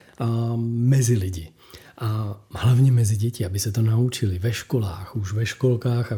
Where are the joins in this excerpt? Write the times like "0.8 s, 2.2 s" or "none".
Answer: none